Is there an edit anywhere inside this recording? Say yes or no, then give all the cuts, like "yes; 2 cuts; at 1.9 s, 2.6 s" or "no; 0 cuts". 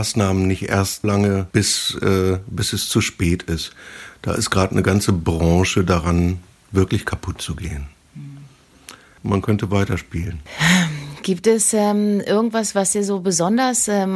yes; 2 cuts; at 1.0 s, 9.2 s